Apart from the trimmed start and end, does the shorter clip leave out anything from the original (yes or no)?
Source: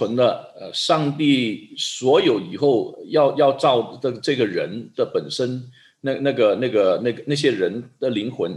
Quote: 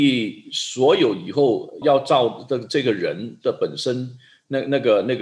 yes